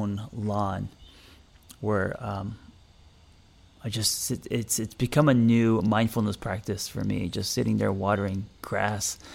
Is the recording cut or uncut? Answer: uncut